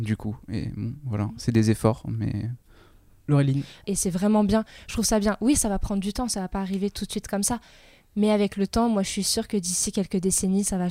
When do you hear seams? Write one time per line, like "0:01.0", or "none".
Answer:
0:03.8